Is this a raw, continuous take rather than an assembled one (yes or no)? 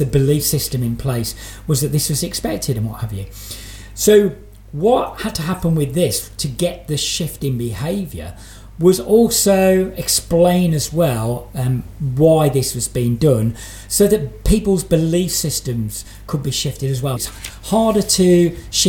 no